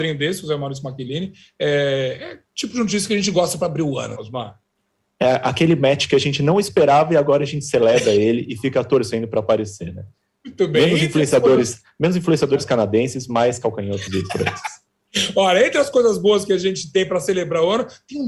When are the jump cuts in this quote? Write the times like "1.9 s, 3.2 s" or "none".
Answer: 4.2 s